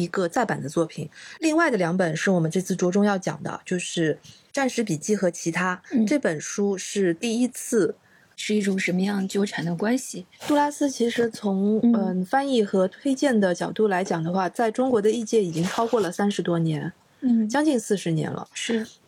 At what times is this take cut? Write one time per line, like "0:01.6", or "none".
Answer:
0:08.2
0:10.4